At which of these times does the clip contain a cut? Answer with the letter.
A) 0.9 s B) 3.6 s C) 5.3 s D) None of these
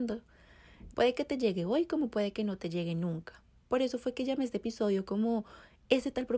A